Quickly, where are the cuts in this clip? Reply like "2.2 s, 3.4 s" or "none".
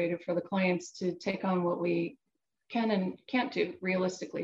none